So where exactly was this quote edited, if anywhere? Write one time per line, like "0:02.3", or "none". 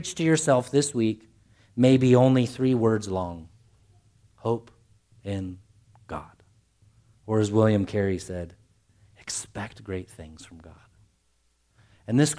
none